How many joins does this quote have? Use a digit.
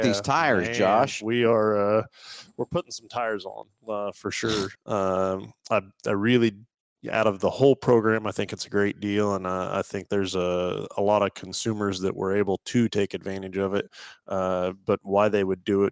1